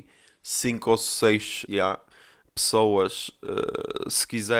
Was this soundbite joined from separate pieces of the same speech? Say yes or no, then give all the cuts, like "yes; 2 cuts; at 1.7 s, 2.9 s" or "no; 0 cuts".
yes; 1 cut; at 1.7 s